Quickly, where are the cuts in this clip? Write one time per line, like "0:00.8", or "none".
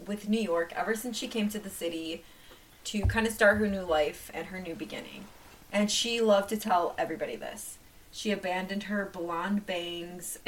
0:08.1